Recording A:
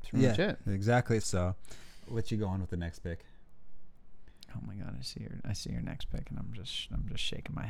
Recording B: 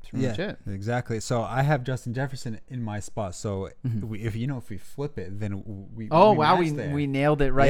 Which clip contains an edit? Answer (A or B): A